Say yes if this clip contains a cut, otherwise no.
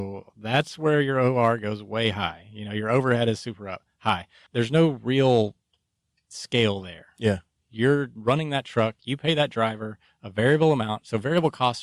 yes